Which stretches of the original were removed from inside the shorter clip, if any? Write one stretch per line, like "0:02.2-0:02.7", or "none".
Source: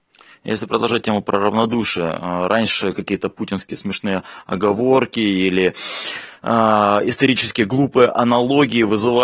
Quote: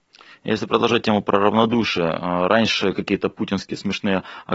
none